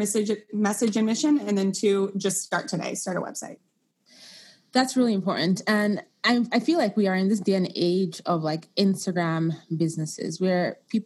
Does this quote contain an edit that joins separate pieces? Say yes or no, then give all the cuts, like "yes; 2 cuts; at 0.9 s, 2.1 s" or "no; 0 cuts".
no; 0 cuts